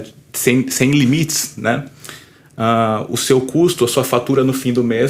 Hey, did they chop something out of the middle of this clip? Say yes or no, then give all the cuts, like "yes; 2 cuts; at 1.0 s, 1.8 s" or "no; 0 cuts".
no; 0 cuts